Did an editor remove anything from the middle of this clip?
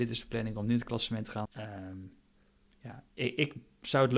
yes; 1 cut; at 1.5 s

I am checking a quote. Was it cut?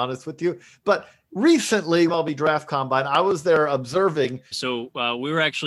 yes; 2 cuts; at 2.1 s, 4.5 s

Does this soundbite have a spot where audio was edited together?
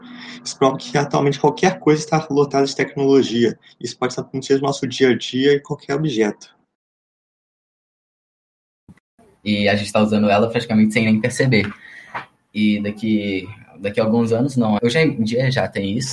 yes; 3 cuts; at 9.4 s, 12.4 s, 14.8 s

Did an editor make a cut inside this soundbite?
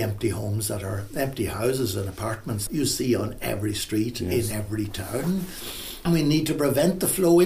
no; 0 cuts

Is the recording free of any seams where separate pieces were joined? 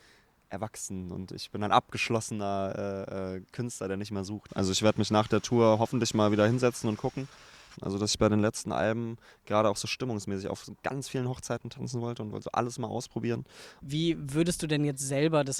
no; 3 cuts; at 4.5 s, 7.7 s, 13.8 s

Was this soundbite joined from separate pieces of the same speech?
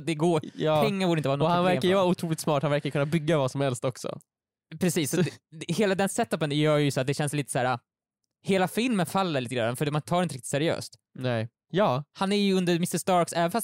yes; 1 cut; at 11.6 s

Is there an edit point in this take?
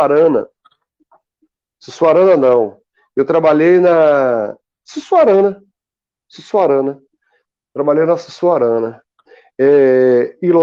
no; 0 cuts

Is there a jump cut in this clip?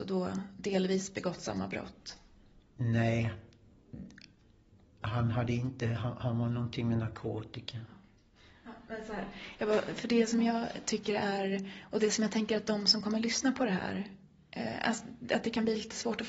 no; 0 cuts

